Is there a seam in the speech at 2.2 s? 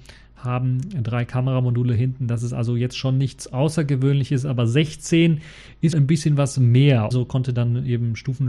no; 2 cuts; at 5.9 s, 7.1 s

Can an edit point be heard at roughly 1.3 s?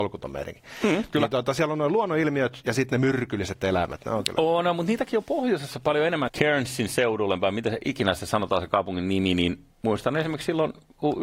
no; 1 cut; at 6.3 s

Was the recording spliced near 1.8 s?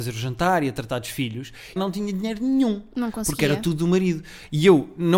yes; 1 cut; at 1.8 s

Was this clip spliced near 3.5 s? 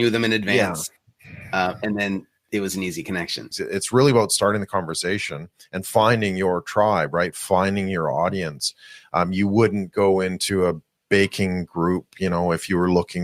yes; 1 cut; at 3.5 s

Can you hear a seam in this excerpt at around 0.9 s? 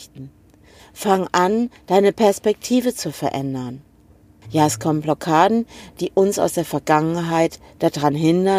no; 1 cut; at 4.4 s

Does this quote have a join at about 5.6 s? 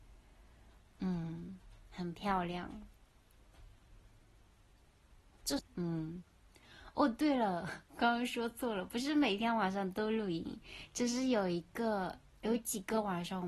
yes; 1 cut; at 5.6 s

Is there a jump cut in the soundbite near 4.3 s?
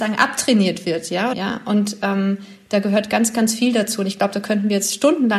no; 1 cut; at 1.3 s

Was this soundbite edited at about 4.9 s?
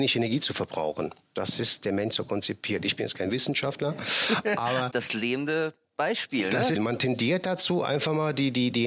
yes; 3 cuts; at 1.2 s, 4.9 s, 6.7 s

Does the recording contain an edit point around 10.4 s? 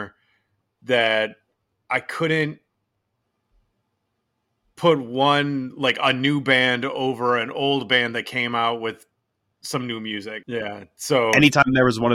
yes; 1 cut; at 10.4 s

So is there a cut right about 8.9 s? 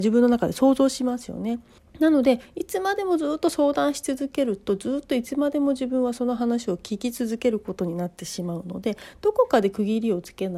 no; 1 cut; at 1.8 s

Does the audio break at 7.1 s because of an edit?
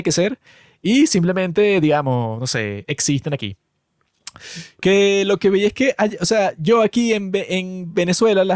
no; 1 cut; at 4.8 s

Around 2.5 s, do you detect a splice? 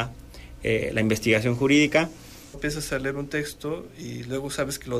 yes; 1 cut; at 2.5 s

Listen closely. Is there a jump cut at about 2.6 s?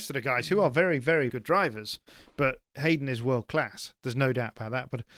no; 1 cut; at 1.3 s

